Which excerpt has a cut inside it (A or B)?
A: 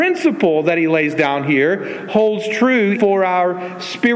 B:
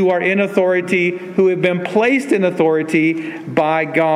A